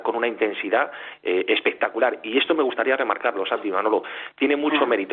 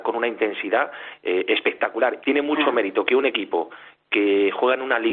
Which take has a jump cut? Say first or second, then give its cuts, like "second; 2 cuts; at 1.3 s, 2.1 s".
second; 1 cut; at 2.2 s